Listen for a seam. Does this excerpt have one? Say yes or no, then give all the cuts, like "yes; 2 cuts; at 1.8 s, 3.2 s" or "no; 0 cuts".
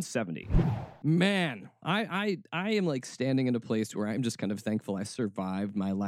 yes; 1 cut; at 1.8 s